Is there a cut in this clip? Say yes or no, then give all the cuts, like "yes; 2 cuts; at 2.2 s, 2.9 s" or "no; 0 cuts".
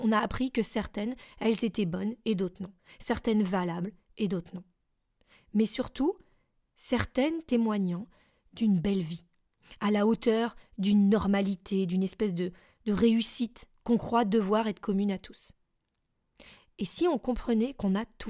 no; 0 cuts